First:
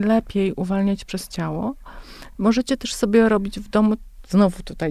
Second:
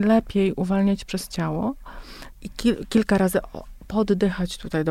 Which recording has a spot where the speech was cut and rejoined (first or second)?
second